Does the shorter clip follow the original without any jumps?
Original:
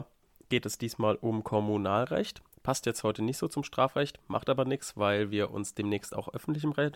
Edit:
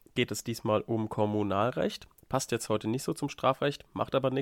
yes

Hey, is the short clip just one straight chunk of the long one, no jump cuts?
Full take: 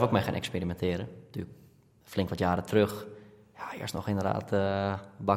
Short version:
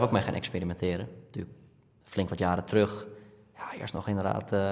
yes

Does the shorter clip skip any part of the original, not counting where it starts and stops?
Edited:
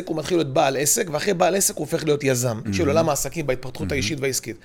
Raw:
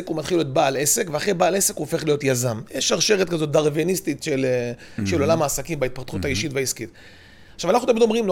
yes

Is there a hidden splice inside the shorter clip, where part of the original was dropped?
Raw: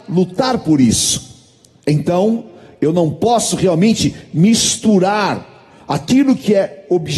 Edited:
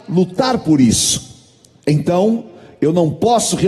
no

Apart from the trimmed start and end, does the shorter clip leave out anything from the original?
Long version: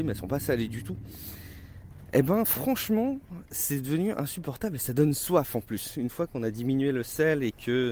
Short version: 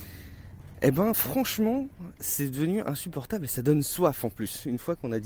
no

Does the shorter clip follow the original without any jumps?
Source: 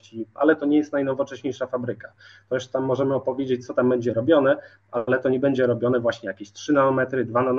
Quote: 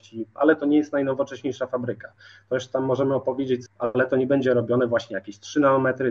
no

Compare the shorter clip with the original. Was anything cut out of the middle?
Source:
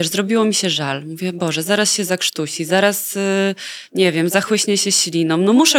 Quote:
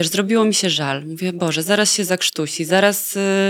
no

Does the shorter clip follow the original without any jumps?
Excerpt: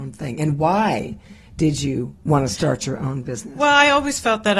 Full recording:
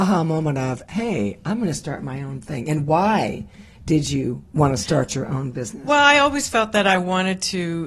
yes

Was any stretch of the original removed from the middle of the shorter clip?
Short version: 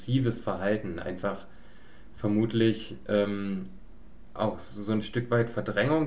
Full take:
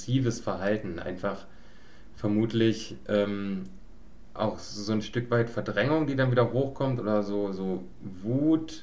no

